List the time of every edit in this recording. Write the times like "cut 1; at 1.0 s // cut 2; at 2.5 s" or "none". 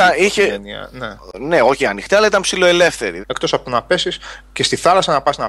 cut 1; at 1.8 s // cut 2; at 3.2 s